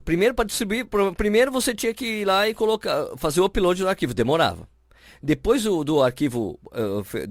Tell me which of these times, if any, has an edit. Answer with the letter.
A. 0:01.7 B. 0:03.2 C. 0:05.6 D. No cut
D